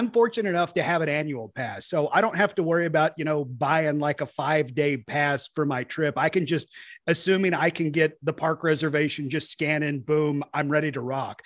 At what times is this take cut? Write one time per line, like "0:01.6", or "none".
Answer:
none